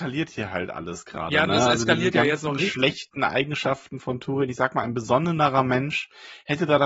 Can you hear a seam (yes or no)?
no